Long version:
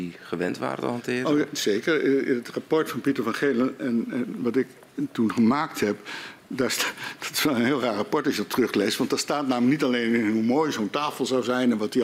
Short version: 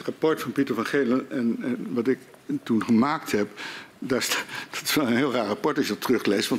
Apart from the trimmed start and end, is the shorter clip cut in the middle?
no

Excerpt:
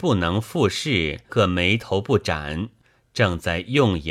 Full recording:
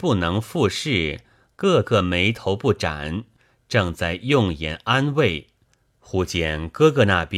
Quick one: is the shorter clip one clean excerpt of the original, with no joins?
no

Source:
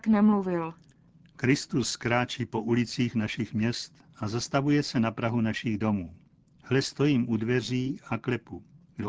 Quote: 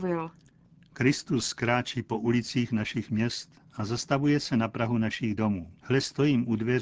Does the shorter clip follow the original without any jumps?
no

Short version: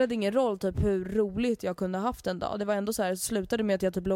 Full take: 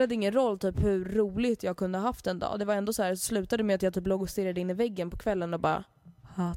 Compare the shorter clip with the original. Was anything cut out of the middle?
no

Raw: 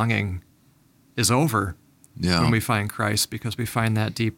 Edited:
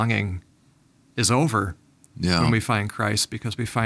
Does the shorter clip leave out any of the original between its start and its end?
no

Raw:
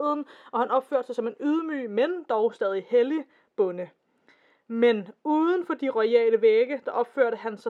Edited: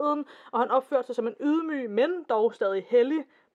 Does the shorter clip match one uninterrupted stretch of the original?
yes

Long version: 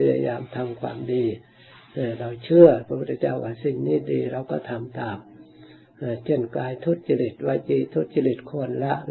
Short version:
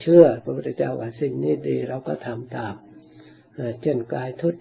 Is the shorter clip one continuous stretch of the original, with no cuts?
yes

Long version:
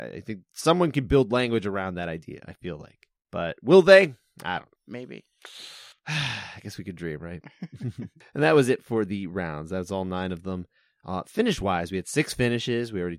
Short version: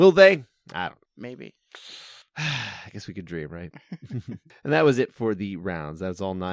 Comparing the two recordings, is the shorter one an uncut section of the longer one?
yes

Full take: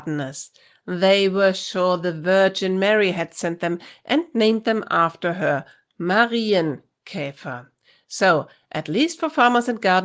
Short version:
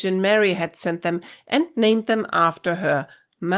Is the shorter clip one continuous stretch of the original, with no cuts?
yes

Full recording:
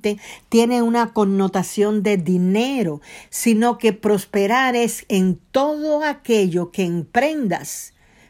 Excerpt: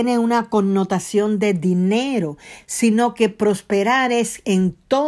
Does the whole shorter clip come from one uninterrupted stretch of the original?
yes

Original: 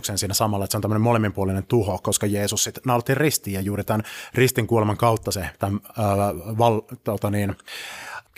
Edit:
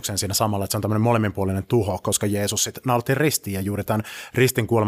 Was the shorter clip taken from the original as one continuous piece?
yes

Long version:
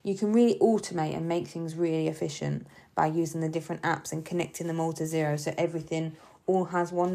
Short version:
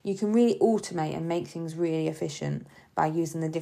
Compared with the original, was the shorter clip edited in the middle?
no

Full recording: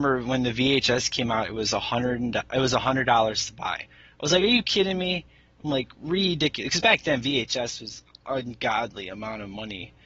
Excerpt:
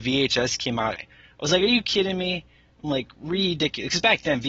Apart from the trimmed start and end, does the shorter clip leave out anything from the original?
yes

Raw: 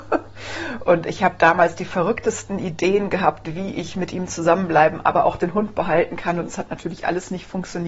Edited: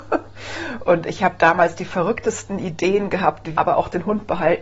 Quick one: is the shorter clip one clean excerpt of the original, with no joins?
no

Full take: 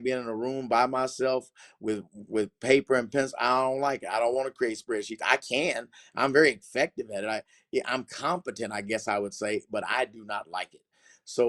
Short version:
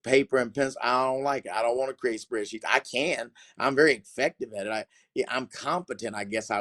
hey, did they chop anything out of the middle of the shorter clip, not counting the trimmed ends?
no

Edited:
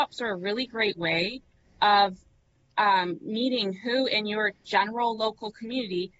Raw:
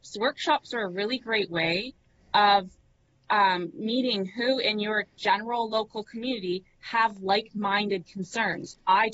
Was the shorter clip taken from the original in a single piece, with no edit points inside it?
yes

